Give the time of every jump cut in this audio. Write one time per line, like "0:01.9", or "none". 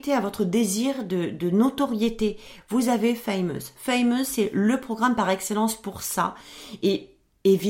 none